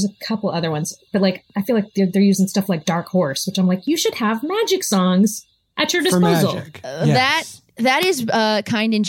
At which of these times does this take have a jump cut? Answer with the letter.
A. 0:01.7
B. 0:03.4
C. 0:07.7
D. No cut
D